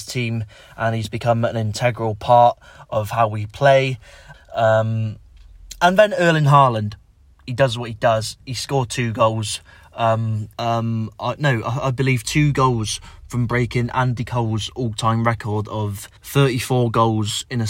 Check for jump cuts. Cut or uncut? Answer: cut